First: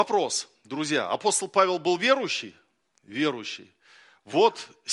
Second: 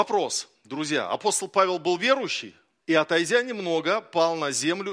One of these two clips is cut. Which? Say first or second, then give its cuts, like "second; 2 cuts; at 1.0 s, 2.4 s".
second; 1 cut; at 2.8 s